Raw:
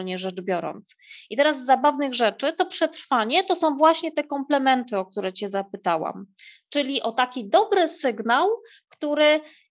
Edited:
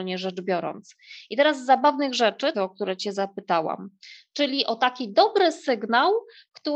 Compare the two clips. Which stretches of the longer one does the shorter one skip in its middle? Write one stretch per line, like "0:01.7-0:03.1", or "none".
0:02.5-0:04.9